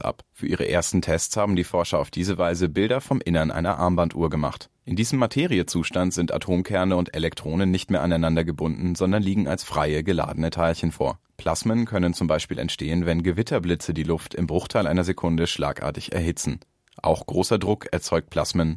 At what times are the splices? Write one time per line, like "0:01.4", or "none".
0:04.8